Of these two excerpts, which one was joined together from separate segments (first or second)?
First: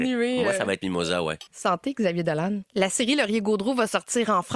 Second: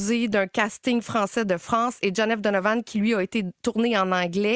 first